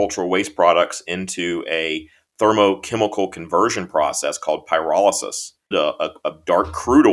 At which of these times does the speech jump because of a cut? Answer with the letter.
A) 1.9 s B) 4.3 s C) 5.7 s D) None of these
C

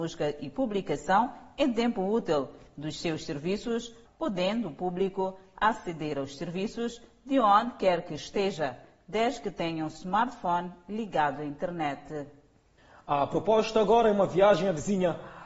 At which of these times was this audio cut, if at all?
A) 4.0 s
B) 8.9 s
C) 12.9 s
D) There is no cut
A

